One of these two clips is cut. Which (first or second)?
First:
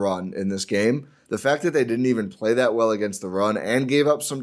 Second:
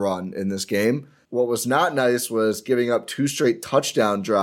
second